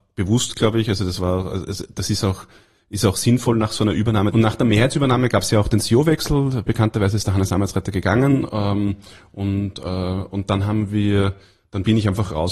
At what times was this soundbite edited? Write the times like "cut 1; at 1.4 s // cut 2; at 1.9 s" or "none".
cut 1; at 4.3 s